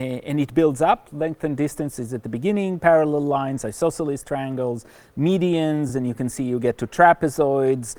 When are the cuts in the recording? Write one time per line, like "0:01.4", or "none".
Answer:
none